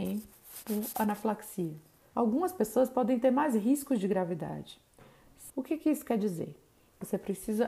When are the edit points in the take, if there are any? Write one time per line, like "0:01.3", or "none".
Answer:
0:02.1
0:05.5